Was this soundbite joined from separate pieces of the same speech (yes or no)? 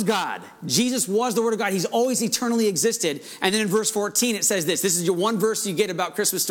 no